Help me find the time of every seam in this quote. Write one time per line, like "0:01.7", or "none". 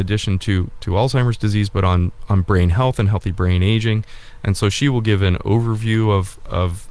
none